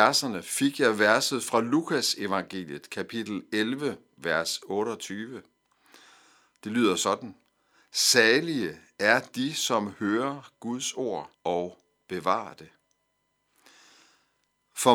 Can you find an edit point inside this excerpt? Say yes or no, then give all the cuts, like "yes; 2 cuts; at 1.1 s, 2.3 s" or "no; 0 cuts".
yes; 1 cut; at 11.3 s